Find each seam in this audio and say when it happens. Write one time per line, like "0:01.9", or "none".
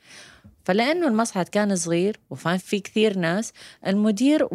0:02.6